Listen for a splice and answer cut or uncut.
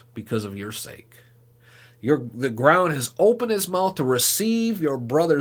uncut